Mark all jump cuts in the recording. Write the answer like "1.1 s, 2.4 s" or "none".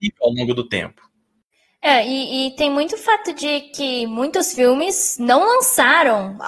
none